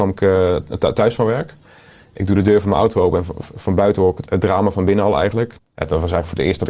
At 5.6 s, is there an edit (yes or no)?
yes